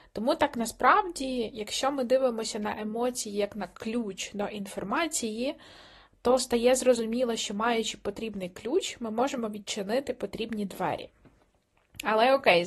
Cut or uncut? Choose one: uncut